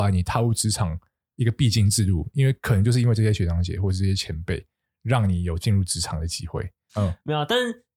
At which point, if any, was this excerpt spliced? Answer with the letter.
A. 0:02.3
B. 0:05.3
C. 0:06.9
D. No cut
C